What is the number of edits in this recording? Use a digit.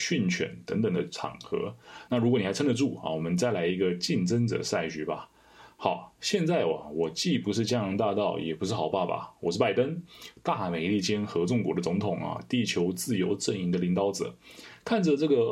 1